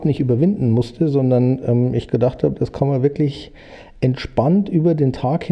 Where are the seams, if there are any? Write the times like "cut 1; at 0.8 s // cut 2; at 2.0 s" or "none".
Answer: none

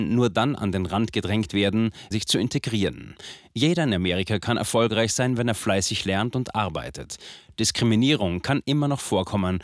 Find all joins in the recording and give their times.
cut 1; at 2.1 s

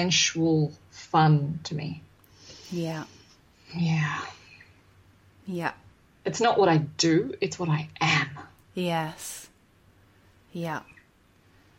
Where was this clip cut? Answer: none

